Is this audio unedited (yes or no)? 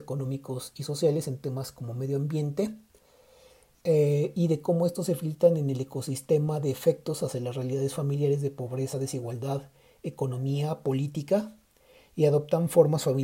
yes